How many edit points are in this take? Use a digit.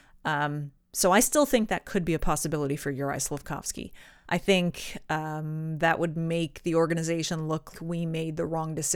2